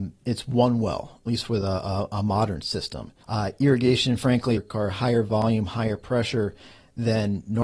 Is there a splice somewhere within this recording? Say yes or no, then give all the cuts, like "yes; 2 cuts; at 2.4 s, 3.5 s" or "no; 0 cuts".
yes; 2 cuts; at 3.2 s, 4.6 s